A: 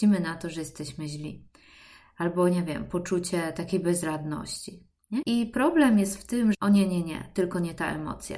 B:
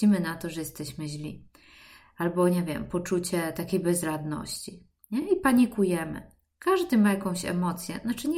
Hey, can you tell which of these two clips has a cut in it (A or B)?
A